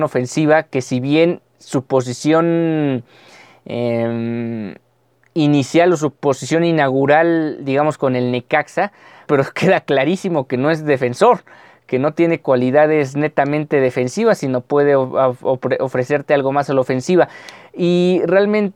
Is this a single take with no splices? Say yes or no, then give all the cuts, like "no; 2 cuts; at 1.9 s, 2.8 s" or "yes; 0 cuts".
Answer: no; 1 cut; at 9.3 s